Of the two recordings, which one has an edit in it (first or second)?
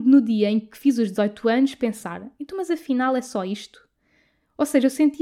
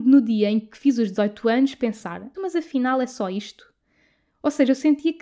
second